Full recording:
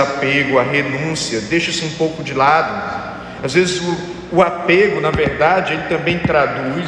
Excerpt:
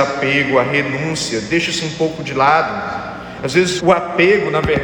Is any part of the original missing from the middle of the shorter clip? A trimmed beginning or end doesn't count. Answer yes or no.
yes